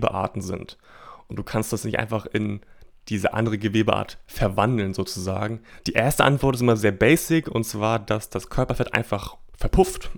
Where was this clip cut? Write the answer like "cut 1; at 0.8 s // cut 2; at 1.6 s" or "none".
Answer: cut 1; at 5.8 s